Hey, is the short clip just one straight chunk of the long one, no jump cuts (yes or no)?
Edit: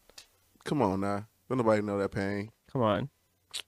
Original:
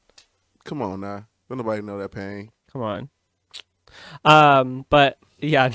yes